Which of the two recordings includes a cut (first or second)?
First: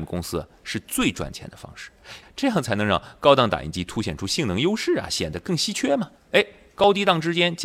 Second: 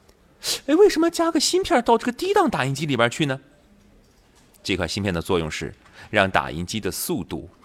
first